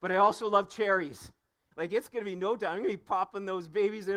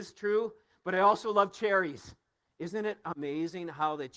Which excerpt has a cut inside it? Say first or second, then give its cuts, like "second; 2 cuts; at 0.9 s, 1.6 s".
first; 1 cut; at 1.7 s